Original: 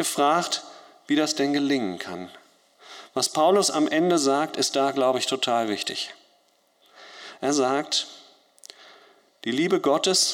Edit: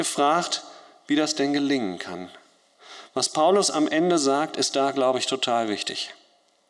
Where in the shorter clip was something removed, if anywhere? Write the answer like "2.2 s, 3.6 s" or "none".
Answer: none